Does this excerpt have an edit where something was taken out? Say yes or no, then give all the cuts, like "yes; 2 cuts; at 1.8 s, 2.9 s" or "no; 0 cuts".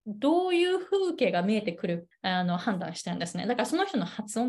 yes; 1 cut; at 2.1 s